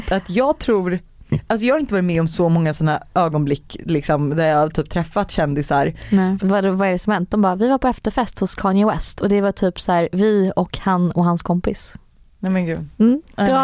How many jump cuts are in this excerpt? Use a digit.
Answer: 1